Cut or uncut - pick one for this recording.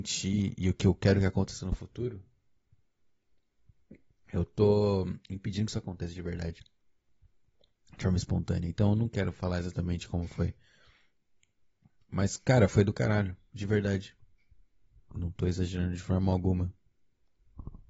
uncut